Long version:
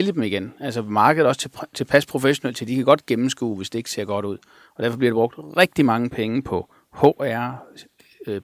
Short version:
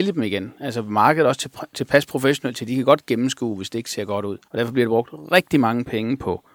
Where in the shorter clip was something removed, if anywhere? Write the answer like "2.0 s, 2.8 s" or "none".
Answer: 4.4 s